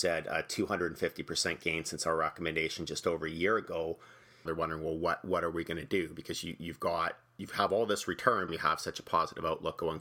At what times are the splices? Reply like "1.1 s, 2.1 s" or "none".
4.5 s, 8.5 s